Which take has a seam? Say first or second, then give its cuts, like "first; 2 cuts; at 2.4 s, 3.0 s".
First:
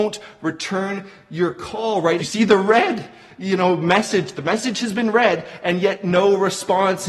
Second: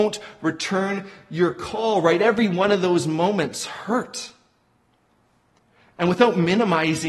first; 1 cut; at 2.2 s